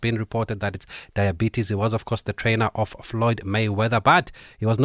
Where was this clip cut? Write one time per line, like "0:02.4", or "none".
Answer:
none